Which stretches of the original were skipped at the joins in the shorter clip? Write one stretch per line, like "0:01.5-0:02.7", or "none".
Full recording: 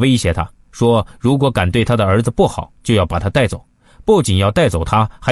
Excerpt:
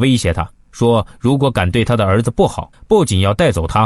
0:02.7-0:03.9